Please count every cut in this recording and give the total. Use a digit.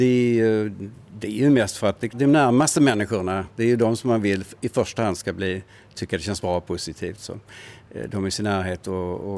1